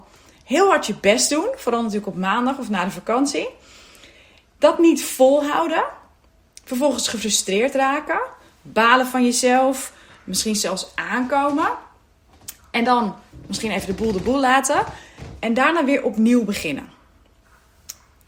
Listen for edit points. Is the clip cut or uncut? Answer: uncut